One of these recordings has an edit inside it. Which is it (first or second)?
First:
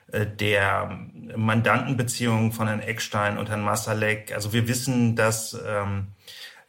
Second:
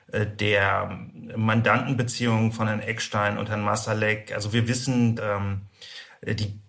second